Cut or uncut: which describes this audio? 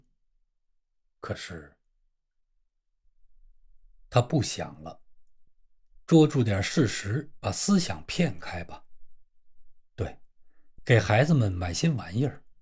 uncut